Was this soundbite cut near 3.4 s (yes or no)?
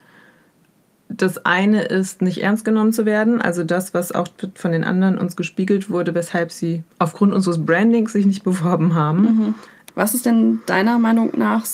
no